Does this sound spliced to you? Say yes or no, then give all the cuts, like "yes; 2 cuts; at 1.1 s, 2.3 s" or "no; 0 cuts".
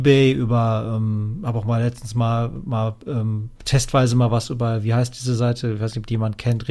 yes; 1 cut; at 3.6 s